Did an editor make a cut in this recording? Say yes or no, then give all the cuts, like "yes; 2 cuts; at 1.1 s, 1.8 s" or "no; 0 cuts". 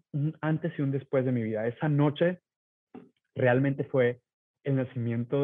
no; 0 cuts